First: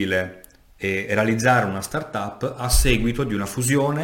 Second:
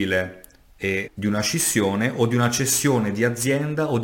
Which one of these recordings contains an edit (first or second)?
second